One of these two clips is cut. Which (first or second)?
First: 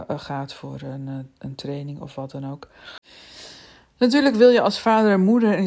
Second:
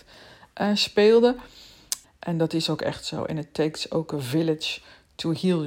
second